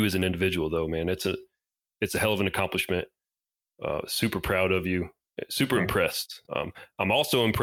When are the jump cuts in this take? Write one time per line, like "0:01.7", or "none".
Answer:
0:06.5

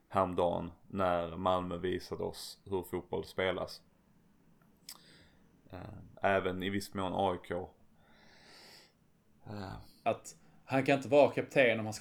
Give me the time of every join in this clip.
0:06.1
0:10.0

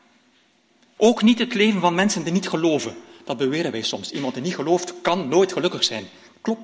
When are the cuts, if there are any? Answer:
0:01.0

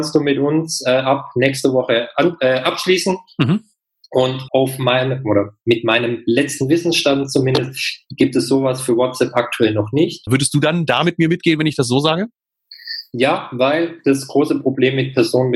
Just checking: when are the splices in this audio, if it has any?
0:04.5
0:10.3

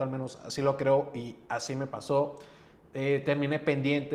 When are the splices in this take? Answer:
none

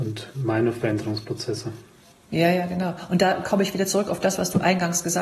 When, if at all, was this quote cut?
none

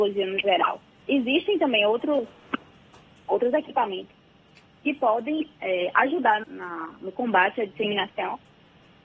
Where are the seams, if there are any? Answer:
0:01.0
0:06.4

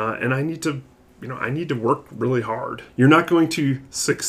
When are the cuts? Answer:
0:02.9

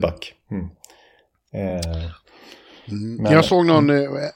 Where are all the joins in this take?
none

